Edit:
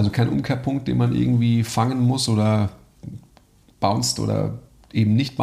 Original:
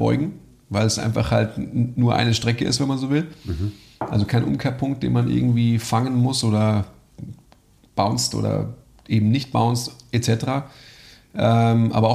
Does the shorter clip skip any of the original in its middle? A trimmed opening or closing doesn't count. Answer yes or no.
no